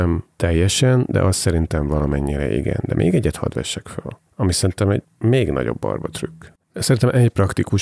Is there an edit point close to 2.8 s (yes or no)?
no